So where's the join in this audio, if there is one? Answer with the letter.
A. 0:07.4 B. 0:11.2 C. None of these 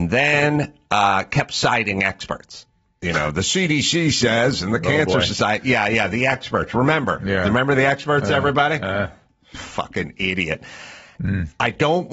B